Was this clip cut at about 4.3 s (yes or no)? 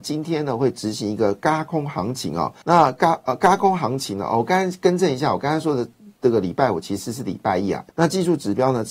no